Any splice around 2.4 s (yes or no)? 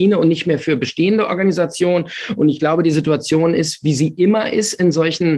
no